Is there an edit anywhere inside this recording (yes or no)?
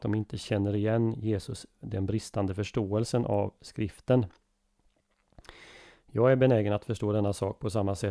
no